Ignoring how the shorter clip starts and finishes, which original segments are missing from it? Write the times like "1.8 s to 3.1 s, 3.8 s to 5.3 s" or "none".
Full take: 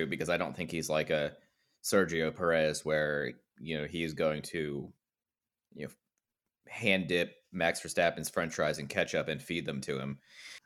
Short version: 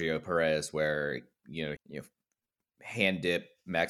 3.9 s to 5.6 s

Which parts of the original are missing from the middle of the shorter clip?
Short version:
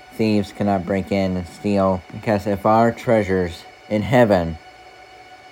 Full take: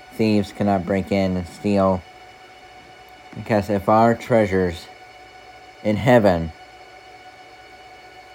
2.0 s to 3.3 s, 5.0 s to 5.7 s

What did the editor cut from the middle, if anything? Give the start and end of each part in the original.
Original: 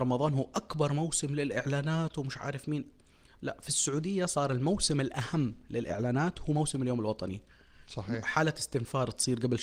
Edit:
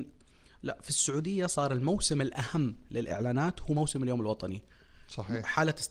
none

